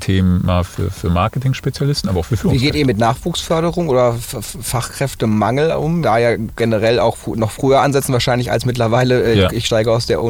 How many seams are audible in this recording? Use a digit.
1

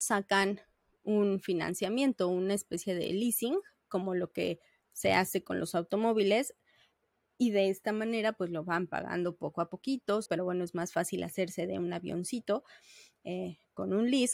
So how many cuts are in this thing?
1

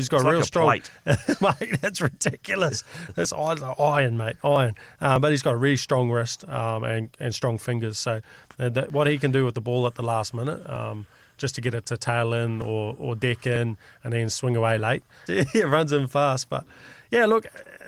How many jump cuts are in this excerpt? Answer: 1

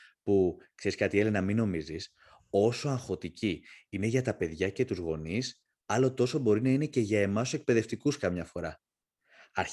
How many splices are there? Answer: 0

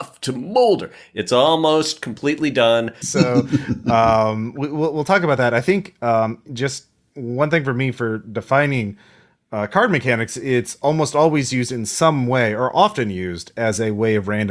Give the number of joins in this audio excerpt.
1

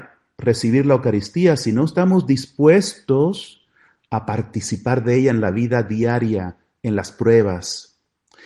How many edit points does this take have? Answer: 0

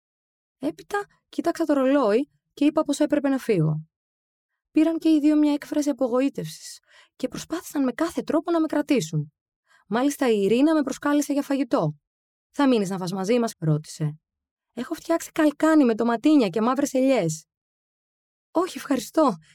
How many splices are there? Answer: 1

